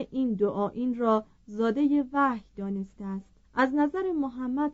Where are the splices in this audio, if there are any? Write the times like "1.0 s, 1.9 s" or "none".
3.4 s

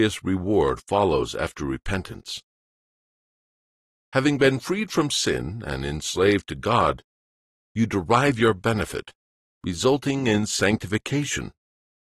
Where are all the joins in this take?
none

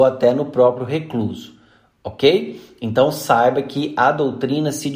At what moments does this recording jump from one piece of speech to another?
none

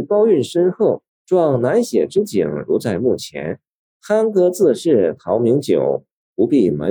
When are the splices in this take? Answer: 1.1 s, 3.9 s

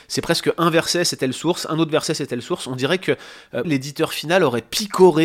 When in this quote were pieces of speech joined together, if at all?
3.6 s

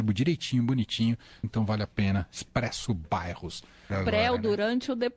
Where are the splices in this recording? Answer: 1.4 s, 3.9 s

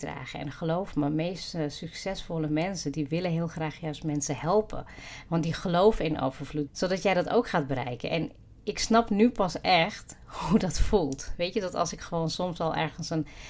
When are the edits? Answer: 6.7 s

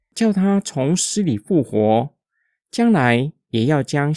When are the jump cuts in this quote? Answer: none

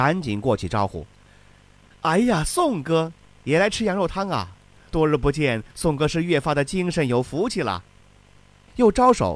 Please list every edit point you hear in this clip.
8.0 s

